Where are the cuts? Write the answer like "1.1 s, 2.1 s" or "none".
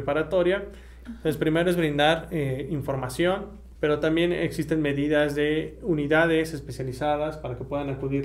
1.0 s, 3.7 s